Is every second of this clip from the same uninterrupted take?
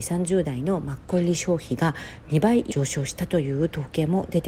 no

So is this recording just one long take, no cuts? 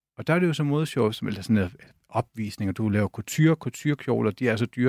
yes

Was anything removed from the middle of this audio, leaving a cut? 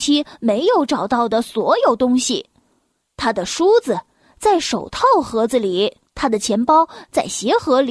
yes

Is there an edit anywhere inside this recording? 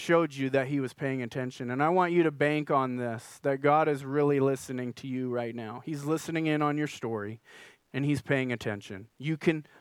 yes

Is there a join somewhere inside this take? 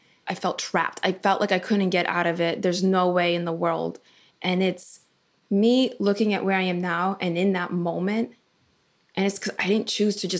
no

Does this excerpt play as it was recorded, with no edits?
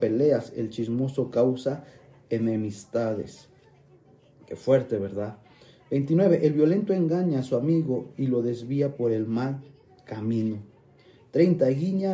yes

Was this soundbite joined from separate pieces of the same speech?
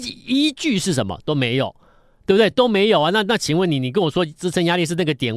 no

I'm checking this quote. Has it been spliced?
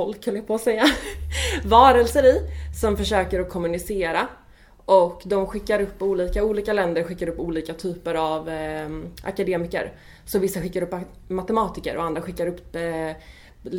no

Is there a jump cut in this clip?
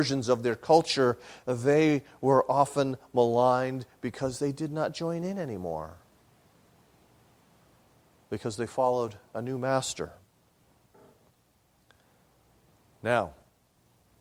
no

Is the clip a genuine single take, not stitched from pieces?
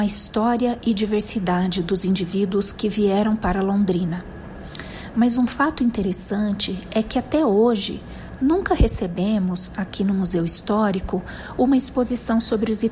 yes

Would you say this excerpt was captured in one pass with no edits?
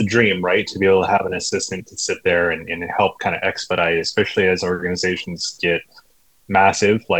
yes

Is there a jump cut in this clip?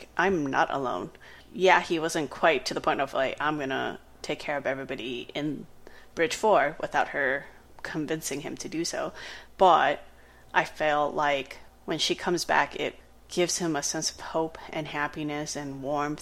yes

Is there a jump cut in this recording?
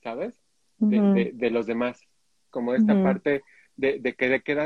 yes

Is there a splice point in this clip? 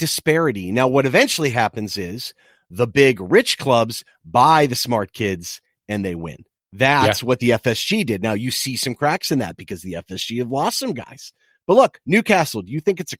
no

